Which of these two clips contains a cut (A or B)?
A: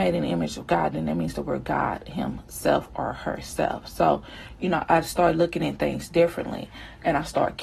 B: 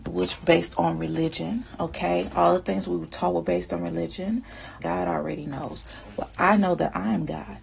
B